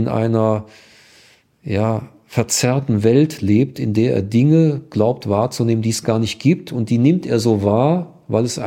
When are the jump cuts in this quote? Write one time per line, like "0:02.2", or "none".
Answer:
none